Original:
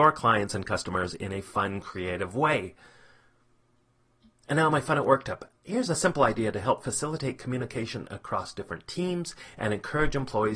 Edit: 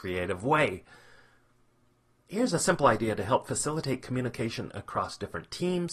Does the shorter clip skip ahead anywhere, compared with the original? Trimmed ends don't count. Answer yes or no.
yes